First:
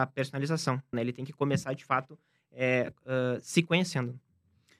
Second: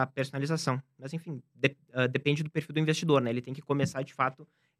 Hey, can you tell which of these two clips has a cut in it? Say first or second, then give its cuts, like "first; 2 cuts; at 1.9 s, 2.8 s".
first; 1 cut; at 0.9 s